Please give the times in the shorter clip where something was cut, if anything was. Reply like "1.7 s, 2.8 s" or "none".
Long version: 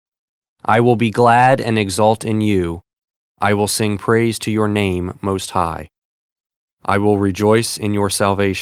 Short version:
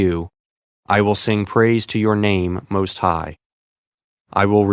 none